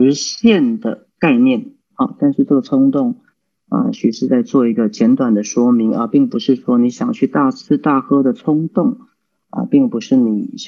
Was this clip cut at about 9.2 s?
no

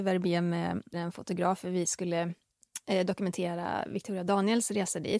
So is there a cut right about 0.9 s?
yes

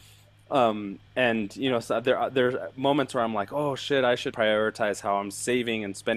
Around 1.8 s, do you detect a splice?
no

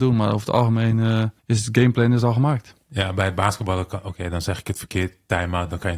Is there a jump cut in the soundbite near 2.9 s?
no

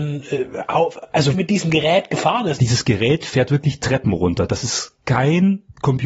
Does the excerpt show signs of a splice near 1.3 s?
yes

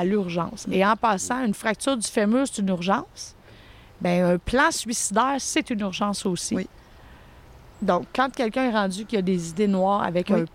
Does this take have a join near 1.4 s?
no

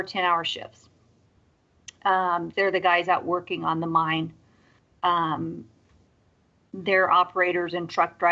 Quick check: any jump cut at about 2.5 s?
yes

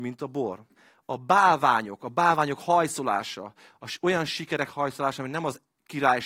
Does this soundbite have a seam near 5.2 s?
no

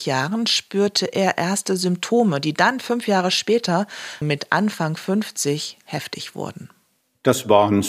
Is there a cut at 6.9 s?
no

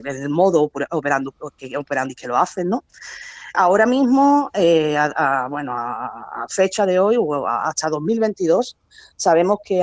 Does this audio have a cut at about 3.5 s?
yes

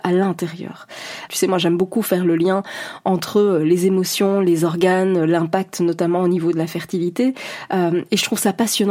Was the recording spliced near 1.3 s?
yes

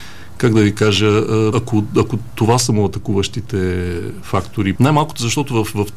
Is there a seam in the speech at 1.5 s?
yes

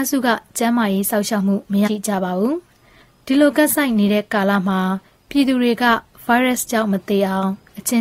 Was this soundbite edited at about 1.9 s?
yes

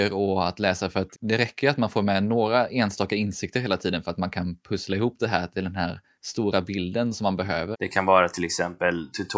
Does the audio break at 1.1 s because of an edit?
yes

